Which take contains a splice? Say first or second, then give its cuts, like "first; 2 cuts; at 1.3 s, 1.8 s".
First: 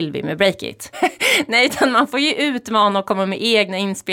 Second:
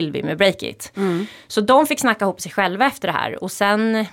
first; 1 cut; at 0.9 s